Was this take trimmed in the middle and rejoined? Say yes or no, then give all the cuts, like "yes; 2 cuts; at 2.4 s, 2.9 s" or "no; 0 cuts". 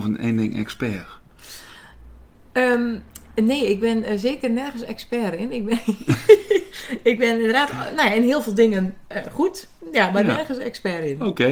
no; 0 cuts